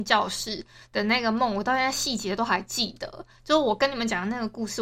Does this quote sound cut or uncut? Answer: uncut